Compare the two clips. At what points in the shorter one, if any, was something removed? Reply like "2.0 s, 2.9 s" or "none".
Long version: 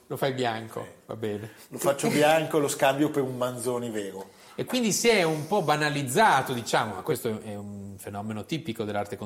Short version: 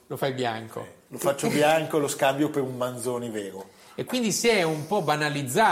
1.1 s